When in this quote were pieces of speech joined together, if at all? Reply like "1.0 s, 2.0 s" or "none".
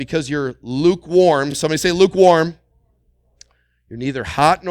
none